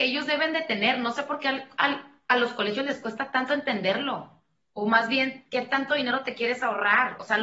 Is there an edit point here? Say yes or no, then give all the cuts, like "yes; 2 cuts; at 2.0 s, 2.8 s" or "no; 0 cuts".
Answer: no; 0 cuts